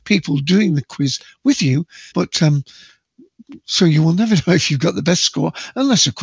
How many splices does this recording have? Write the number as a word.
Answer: one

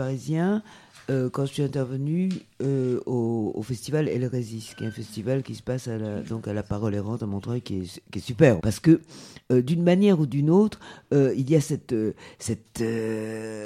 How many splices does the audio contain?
one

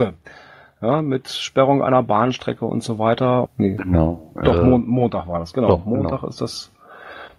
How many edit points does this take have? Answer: one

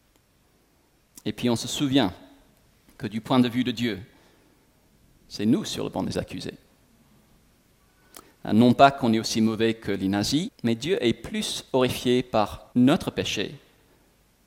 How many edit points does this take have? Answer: two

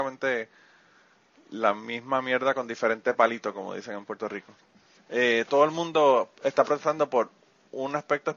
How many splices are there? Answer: one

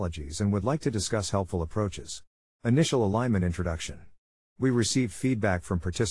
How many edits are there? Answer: zero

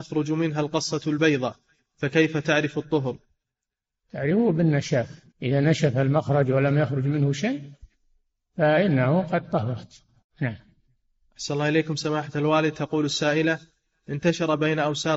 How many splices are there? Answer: one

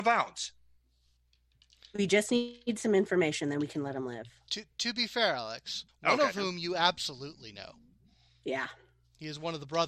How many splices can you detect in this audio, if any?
one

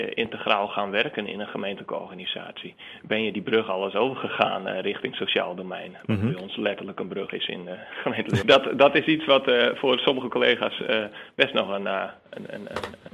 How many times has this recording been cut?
one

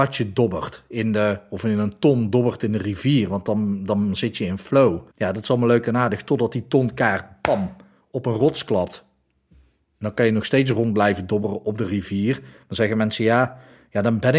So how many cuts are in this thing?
one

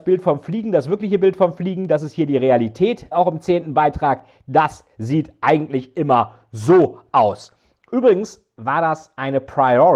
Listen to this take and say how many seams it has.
one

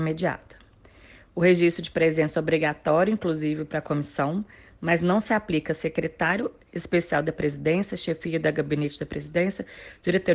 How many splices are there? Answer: zero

